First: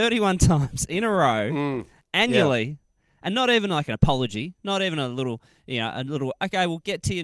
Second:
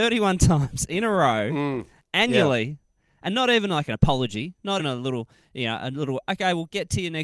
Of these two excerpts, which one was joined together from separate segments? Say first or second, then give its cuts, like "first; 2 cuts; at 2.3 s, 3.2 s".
second; 1 cut; at 4.8 s